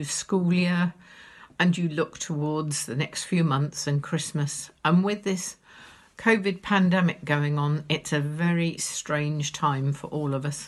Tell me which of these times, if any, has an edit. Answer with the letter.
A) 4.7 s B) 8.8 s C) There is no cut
B